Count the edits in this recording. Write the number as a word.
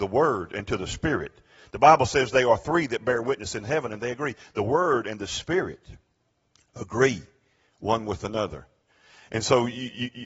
zero